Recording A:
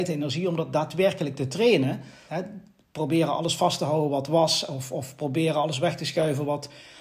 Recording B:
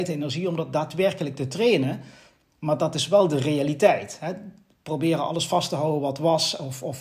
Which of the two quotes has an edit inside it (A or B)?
A